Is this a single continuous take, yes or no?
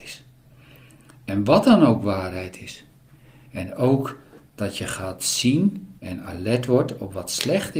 no